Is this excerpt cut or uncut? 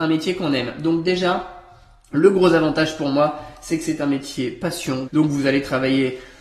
cut